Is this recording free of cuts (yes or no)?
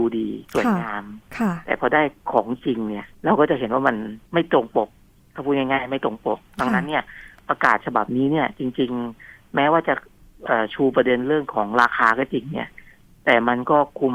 no